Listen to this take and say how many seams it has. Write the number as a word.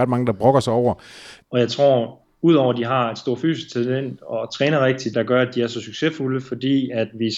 two